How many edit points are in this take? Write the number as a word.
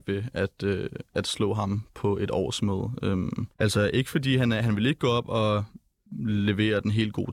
one